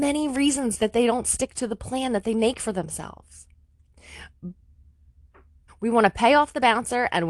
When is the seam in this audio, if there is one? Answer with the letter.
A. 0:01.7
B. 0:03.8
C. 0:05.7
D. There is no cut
C